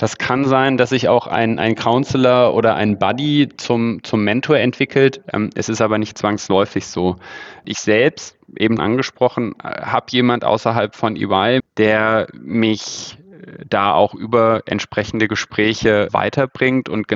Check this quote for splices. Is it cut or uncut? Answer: cut